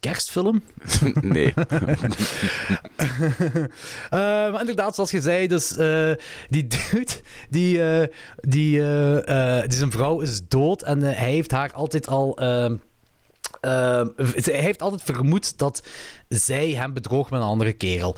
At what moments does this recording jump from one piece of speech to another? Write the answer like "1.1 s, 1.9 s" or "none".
none